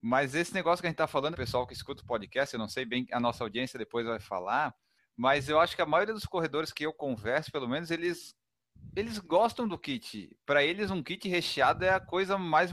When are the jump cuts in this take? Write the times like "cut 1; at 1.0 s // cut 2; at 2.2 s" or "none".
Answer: cut 1; at 1.3 s